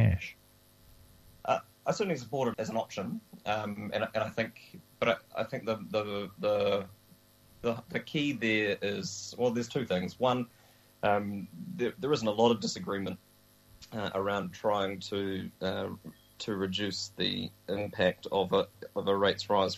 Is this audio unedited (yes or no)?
no